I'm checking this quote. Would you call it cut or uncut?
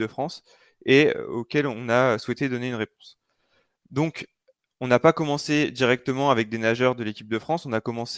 uncut